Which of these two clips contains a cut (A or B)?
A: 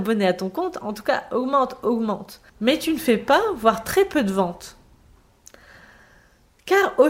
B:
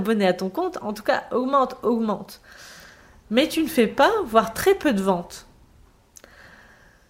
A